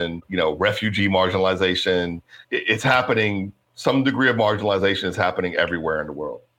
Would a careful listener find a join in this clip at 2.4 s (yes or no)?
yes